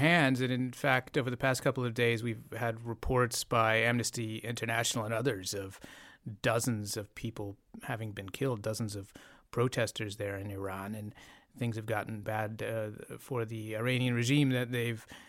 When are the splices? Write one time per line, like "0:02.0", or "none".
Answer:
0:12.2